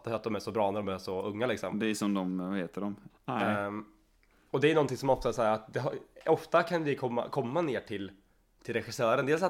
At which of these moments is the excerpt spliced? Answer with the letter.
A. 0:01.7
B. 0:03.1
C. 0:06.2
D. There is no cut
B